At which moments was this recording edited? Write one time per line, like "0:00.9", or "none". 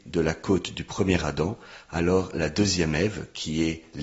none

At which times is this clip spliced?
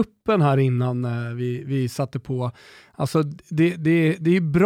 none

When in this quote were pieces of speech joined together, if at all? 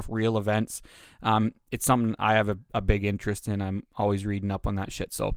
none

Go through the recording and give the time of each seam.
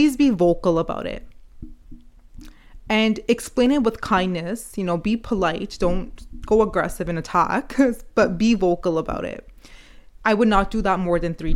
0:10.2

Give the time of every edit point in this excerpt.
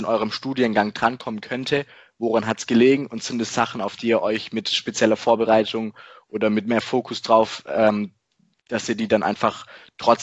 none

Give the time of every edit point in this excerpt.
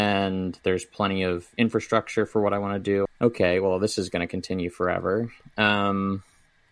0:03.1

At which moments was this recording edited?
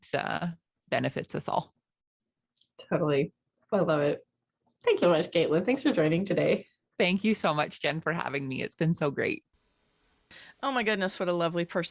0:05.0

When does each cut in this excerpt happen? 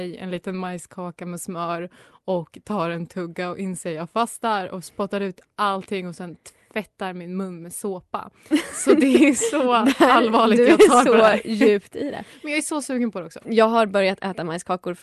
none

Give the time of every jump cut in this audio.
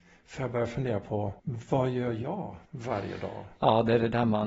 0:01.4
0:02.7

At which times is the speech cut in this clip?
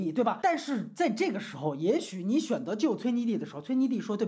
none

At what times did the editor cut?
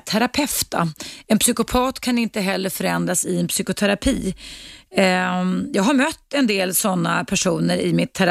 none

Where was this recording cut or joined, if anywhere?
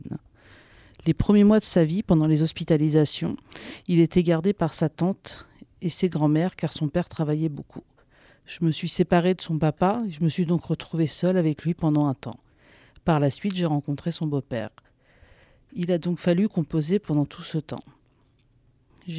none

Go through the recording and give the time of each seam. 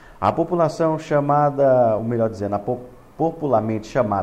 none

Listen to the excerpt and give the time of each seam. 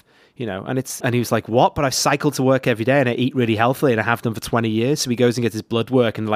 0:01.0

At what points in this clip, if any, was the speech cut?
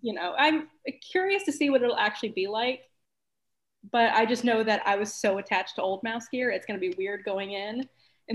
none

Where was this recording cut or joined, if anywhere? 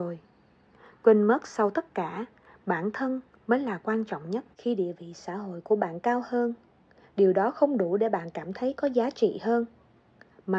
0:04.5

